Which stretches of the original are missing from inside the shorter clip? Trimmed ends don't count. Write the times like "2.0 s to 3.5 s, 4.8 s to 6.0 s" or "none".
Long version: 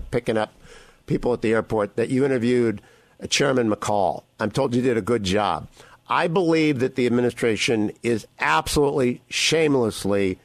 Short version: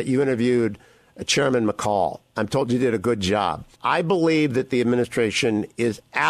5.8 s to 6.0 s